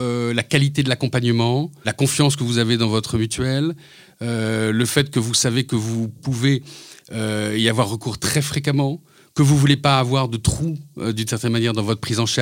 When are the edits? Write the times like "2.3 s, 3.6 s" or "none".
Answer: 1.8 s